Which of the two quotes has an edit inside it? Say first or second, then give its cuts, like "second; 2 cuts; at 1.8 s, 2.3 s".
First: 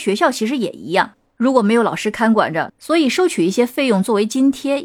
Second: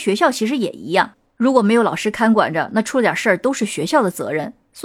first; 1 cut; at 2.7 s